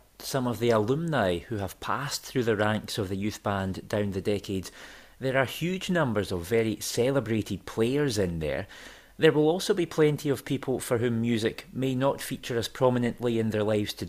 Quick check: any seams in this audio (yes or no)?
no